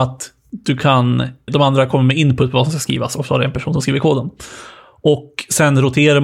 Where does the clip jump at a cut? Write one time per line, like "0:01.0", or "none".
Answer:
0:01.5